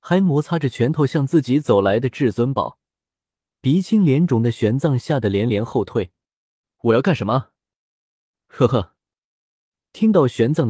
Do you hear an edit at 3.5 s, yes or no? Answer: yes